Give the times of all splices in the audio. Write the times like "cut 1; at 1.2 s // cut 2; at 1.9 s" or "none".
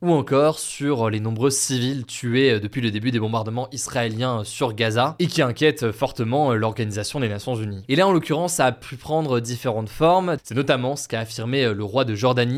cut 1; at 10.4 s

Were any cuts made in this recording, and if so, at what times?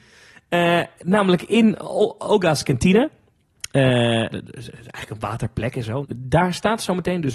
cut 1; at 4.3 s // cut 2; at 6.0 s

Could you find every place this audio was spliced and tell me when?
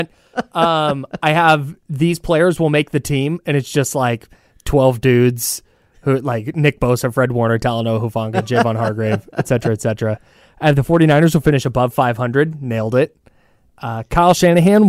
none

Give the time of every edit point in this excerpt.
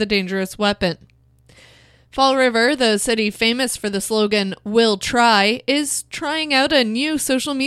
none

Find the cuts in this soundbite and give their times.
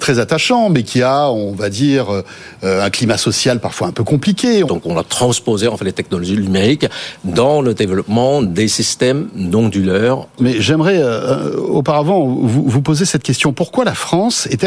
cut 1; at 4.7 s // cut 2; at 10.4 s

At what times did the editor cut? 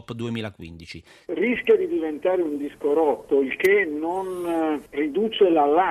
cut 1; at 1.3 s

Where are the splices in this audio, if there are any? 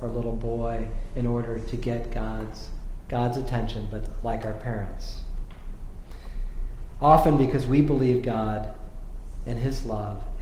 cut 1; at 3.1 s

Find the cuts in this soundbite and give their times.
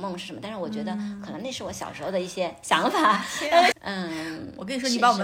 cut 1; at 3.7 s

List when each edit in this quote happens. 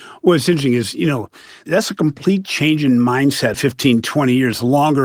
cut 1; at 3.5 s

